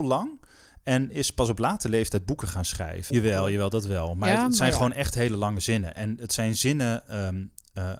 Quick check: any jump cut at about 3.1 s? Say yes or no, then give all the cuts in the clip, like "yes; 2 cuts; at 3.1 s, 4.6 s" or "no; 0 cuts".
yes; 1 cut; at 3.1 s